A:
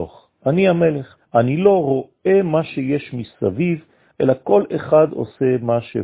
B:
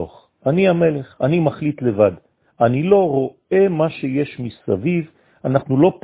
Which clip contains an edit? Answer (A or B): A